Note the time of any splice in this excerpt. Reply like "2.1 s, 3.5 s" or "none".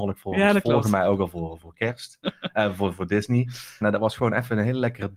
3.8 s